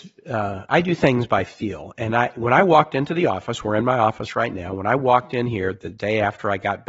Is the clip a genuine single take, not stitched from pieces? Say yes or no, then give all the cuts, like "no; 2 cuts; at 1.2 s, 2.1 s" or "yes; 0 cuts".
yes; 0 cuts